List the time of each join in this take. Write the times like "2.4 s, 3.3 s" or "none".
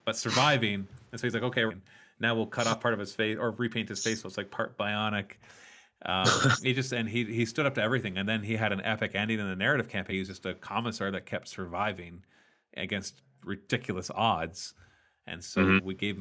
1.7 s, 10.1 s